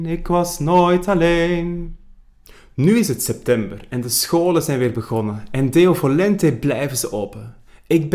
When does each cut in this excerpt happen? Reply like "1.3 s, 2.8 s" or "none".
none

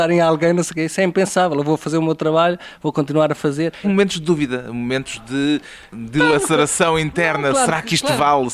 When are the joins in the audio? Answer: 3.8 s

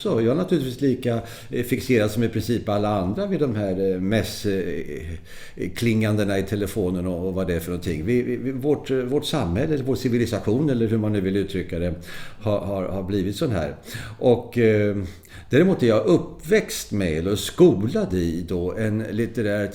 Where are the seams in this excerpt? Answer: none

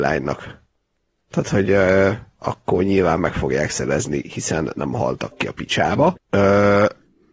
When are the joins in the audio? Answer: 6.1 s

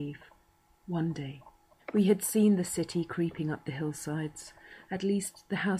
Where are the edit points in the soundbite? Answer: 1.8 s, 4.8 s

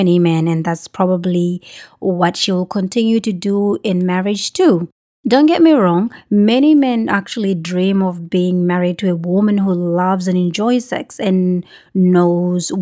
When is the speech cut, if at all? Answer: none

